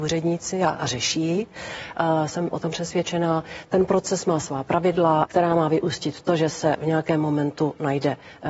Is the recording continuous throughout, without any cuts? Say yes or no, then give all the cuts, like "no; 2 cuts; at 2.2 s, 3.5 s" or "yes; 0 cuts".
no; 1 cut; at 5.3 s